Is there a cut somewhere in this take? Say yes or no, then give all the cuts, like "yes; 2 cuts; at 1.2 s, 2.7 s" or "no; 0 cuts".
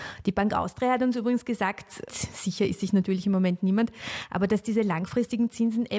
yes; 1 cut; at 2.1 s